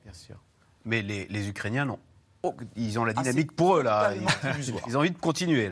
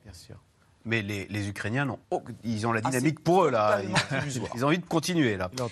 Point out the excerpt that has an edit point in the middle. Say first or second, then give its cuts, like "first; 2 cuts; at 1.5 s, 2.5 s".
second; 1 cut; at 2.0 s